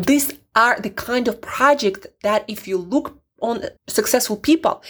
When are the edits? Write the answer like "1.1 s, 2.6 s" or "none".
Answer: 3.8 s

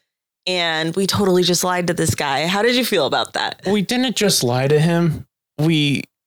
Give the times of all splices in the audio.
none

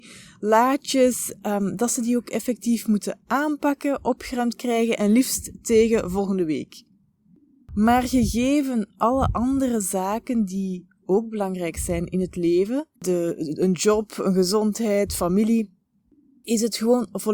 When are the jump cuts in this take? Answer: 13.0 s

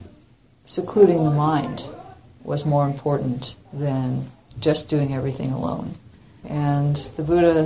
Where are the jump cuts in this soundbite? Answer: 3.7 s, 6.4 s

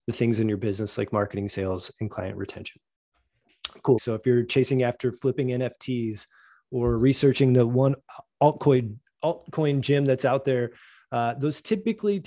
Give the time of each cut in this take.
4.0 s

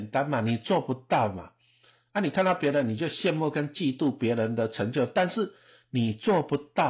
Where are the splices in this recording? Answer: none

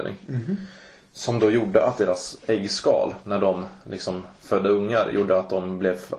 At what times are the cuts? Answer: none

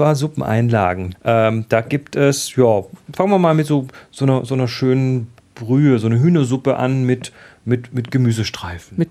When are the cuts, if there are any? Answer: 1.1 s

